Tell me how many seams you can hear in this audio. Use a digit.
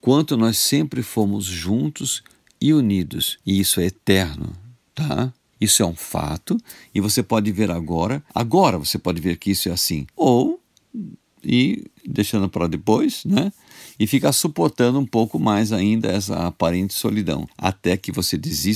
2